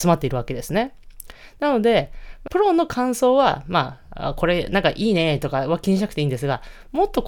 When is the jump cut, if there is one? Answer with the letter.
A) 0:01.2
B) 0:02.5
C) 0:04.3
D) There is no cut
B